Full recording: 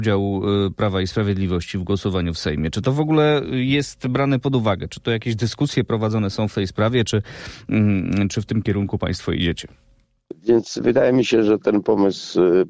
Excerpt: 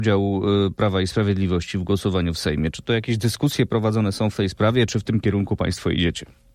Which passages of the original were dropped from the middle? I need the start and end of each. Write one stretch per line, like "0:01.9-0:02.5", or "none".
0:02.7-0:04.9
0:07.1-0:08.3